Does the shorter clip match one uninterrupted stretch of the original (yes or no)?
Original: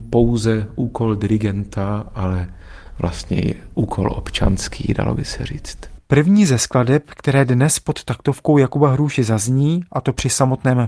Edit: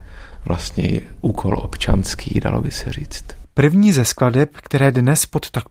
yes